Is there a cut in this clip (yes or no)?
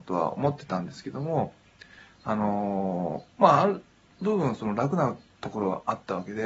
no